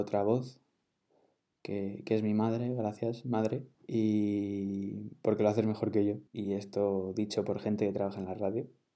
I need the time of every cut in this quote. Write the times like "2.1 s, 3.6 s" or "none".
3.7 s, 6.3 s